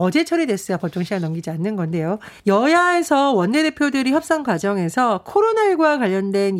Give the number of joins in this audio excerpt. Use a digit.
1